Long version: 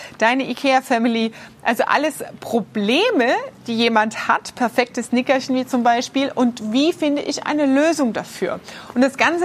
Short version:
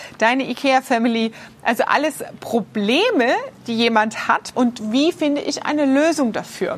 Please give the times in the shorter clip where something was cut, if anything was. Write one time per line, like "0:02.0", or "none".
0:04.5